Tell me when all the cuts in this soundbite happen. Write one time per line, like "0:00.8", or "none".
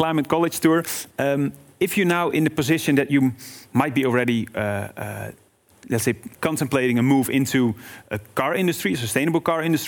0:01.1
0:06.3

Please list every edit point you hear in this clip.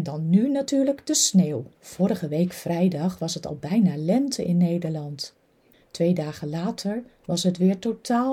0:01.7
0:05.7

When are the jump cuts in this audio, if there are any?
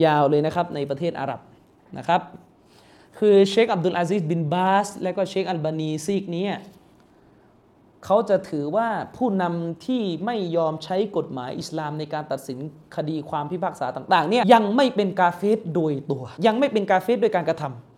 0:14.4
0:16.4

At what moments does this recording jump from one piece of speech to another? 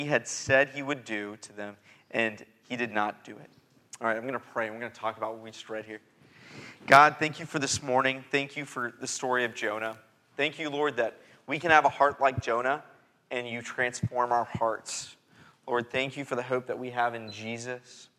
none

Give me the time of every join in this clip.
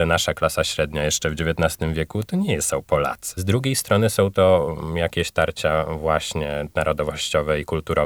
0:03.4

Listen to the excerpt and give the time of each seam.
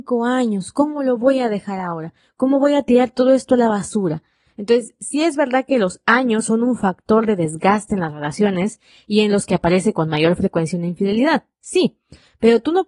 0:04.5

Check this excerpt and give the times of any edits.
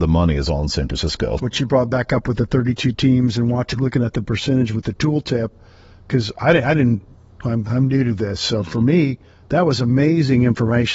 0:01.4

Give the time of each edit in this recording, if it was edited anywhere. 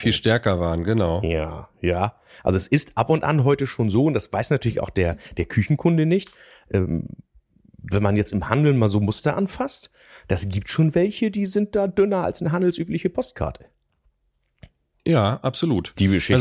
none

